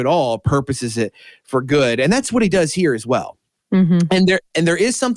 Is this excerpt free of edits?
yes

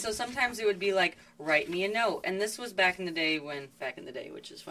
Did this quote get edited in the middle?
no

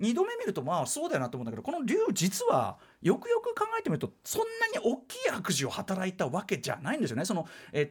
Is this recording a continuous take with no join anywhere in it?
yes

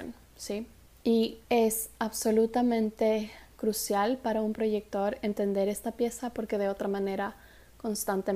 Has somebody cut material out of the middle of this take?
yes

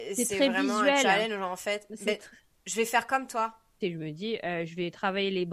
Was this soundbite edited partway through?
yes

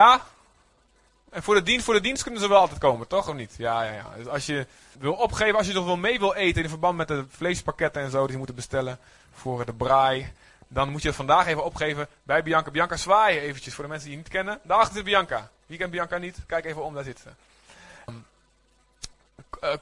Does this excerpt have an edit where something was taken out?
yes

